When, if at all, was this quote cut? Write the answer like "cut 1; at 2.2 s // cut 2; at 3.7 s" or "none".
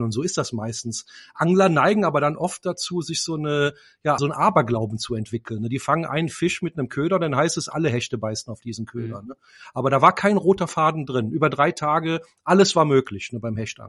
cut 1; at 4.2 s